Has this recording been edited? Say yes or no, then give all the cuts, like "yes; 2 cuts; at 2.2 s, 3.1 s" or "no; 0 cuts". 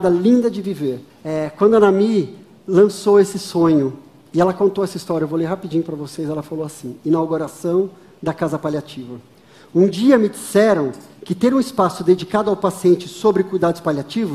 yes; 1 cut; at 1.1 s